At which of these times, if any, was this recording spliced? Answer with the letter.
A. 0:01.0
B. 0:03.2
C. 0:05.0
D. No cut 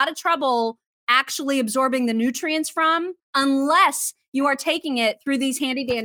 B